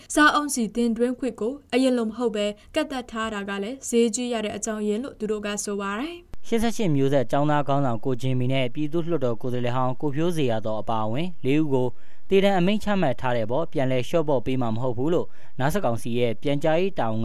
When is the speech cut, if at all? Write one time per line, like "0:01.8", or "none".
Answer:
0:15.8